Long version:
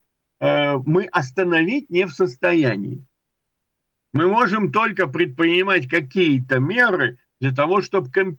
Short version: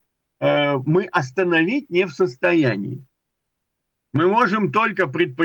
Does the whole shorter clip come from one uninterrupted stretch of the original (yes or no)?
yes